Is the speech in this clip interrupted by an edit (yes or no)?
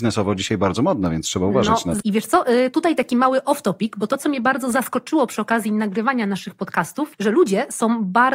yes